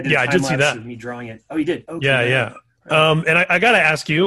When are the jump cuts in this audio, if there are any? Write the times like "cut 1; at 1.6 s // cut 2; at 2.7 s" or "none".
none